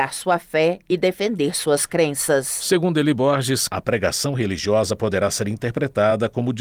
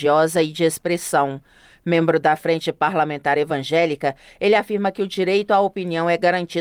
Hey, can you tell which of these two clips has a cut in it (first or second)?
first